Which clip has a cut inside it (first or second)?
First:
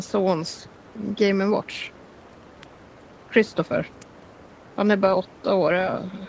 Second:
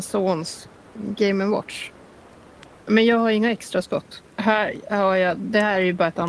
second